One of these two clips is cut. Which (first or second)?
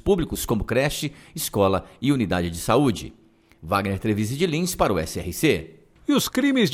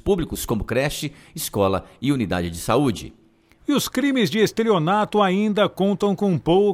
second